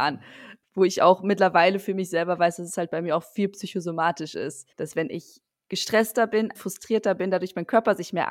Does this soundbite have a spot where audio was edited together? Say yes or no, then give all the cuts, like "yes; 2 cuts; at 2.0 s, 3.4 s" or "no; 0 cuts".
yes; 2 cuts; at 4.7 s, 6.5 s